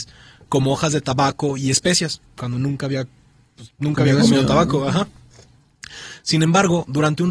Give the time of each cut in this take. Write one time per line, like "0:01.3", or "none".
0:06.2